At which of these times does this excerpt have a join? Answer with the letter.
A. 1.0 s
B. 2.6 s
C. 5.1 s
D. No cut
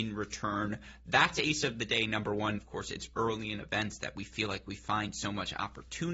B